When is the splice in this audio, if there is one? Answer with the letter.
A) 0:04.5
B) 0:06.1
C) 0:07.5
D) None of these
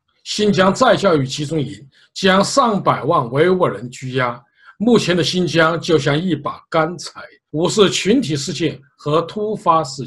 C